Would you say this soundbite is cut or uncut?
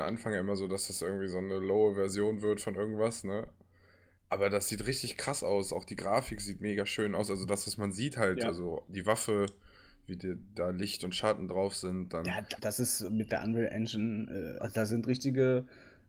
cut